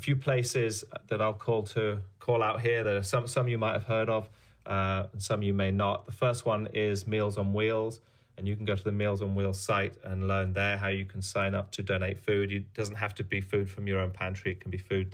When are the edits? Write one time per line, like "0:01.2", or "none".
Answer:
none